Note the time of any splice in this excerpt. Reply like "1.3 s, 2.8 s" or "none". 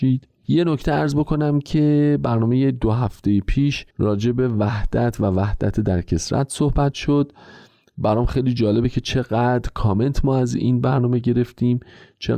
3.9 s